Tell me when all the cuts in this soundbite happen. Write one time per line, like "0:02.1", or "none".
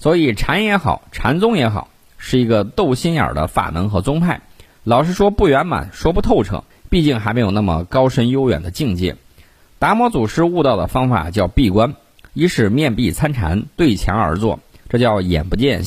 0:04.7
0:06.7